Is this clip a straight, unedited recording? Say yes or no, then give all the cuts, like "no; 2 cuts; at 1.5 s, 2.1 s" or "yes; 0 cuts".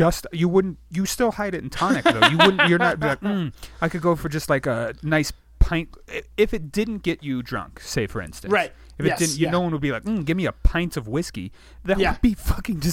yes; 0 cuts